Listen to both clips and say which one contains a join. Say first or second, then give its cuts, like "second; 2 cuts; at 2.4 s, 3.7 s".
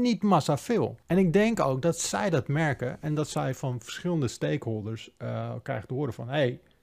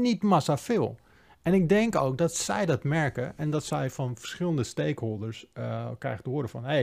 first; 1 cut; at 1.0 s